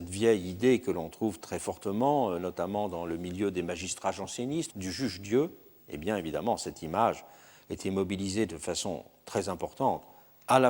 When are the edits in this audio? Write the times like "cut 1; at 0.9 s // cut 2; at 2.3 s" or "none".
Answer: cut 1; at 4.7 s